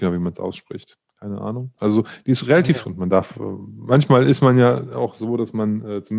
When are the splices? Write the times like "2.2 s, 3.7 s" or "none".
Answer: 1.8 s, 2.8 s